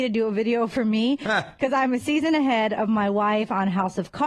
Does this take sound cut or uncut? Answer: uncut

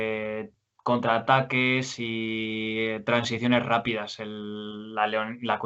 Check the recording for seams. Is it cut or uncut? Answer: uncut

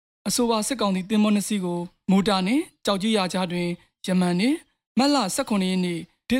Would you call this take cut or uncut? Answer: uncut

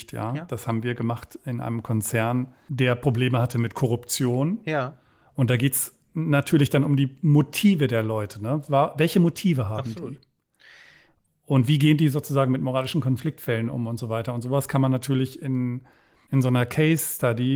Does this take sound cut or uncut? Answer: uncut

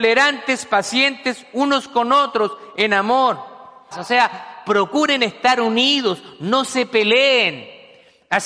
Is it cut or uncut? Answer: cut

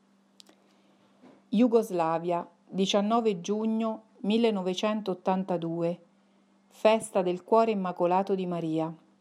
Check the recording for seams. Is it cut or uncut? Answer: uncut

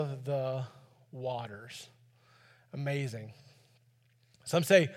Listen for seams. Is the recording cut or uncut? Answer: uncut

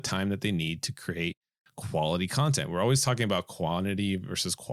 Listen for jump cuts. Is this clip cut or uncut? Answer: uncut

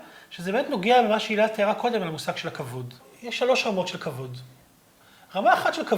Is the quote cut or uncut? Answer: uncut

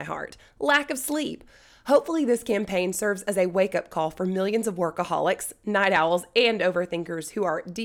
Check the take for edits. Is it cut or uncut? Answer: uncut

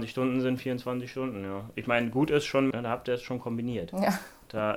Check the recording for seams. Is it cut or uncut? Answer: cut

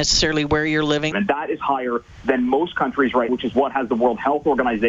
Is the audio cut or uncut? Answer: cut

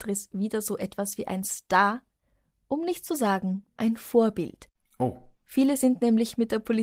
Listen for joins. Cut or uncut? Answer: uncut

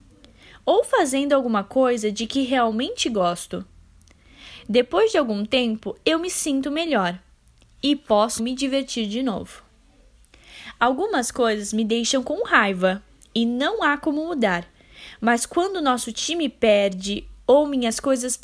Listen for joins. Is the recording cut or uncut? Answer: cut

